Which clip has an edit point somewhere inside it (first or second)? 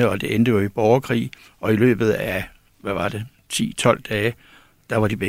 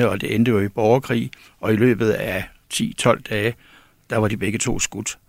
second